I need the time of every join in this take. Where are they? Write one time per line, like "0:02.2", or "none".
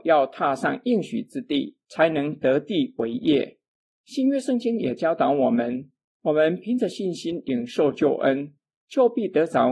none